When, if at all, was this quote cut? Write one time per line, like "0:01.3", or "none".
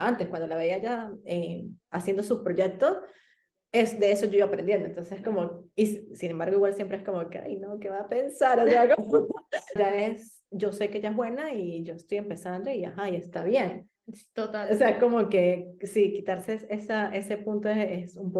0:09.8